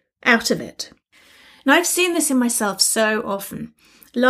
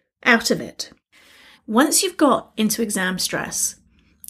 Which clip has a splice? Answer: second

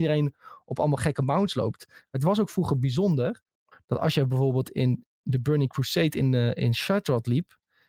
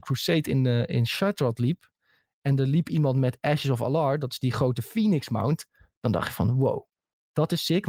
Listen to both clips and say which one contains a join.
first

